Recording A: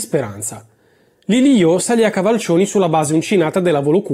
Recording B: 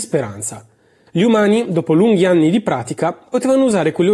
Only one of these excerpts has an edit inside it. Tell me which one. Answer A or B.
B